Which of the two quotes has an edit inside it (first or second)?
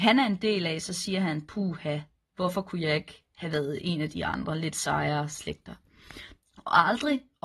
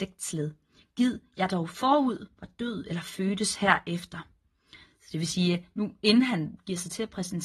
first